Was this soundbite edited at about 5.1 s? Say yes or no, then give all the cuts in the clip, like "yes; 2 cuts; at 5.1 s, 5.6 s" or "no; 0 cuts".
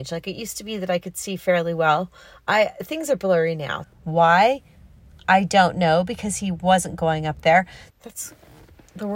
no; 2 cuts; at 3.8 s, 7.9 s